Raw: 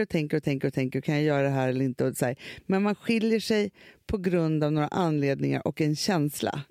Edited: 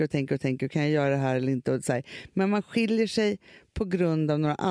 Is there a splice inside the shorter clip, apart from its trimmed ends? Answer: no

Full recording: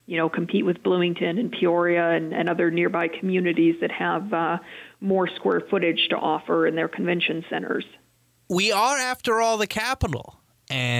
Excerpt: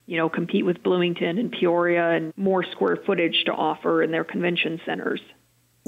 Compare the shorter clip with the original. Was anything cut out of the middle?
yes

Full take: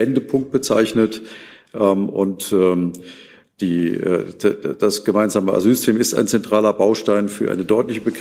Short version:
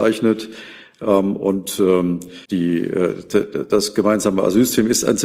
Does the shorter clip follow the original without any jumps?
no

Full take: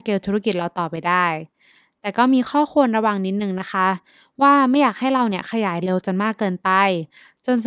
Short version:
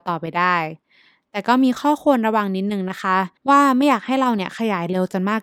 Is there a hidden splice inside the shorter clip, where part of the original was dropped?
yes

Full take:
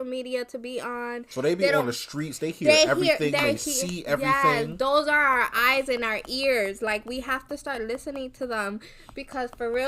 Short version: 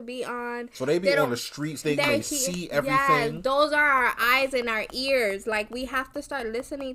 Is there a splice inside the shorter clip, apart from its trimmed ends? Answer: yes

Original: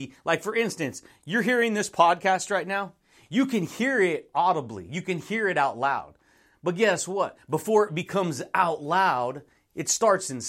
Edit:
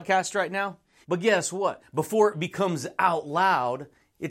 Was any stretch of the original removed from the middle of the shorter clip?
yes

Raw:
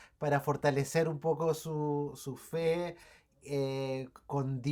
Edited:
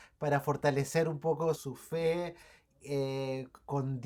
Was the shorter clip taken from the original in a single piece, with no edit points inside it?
no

